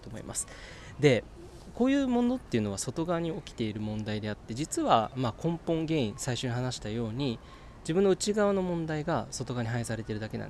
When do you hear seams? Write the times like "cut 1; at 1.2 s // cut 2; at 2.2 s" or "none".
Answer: none